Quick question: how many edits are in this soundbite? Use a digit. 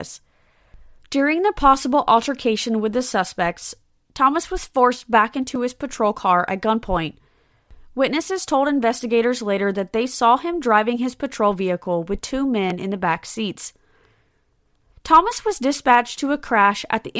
0